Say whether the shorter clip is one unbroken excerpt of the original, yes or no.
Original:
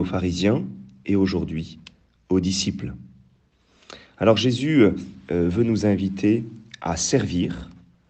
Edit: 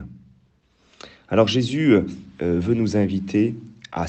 yes